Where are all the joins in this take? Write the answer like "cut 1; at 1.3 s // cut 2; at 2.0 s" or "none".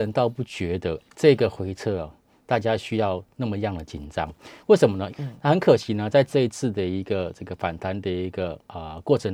cut 1; at 1.1 s // cut 2; at 5.1 s